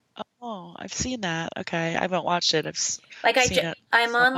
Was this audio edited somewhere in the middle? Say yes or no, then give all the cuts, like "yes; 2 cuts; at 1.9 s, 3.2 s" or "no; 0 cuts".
no; 0 cuts